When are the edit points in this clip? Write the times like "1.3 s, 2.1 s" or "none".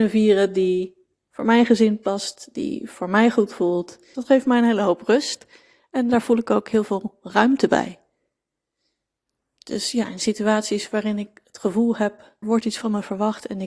4.1 s, 12.4 s